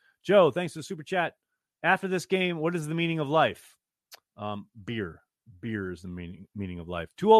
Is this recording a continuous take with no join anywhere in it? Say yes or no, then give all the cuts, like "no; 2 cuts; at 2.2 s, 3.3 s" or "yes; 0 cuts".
yes; 0 cuts